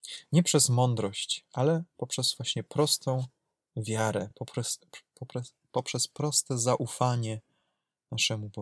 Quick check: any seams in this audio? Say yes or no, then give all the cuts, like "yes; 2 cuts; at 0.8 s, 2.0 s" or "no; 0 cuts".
no; 0 cuts